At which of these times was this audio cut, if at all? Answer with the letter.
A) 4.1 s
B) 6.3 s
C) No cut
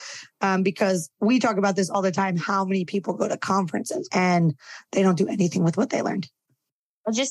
A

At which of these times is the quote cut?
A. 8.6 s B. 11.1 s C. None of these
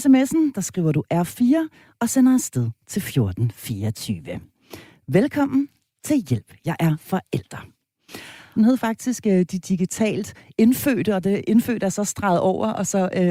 A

